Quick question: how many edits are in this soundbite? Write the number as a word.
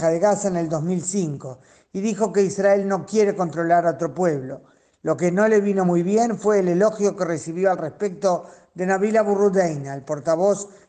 zero